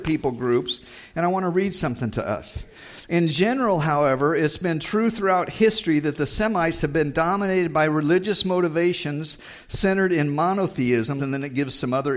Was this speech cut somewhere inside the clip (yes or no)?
yes